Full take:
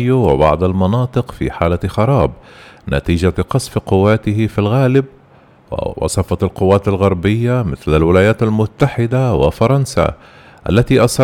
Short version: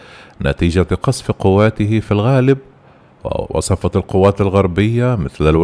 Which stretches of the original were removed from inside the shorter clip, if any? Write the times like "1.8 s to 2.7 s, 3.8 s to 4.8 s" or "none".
none